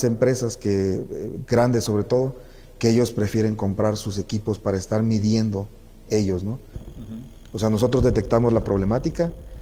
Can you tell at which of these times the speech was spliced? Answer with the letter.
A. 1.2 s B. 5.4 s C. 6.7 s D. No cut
C